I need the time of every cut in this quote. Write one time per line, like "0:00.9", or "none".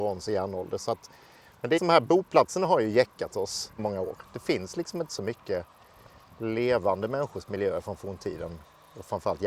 0:01.8
0:03.8